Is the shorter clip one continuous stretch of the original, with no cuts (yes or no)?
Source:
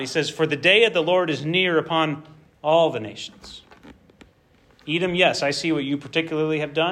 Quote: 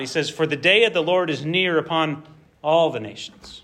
yes